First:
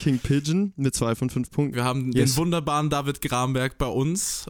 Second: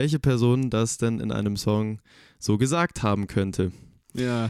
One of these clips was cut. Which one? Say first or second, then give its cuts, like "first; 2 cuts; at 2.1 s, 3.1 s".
first; 1 cut; at 1.7 s